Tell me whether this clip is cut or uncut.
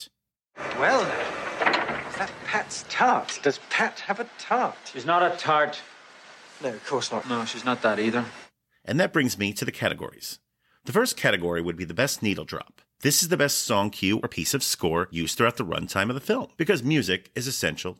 cut